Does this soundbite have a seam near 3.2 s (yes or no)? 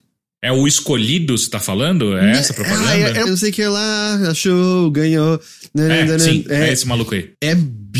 yes